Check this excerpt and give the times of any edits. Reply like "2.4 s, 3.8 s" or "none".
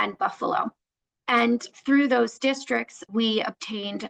none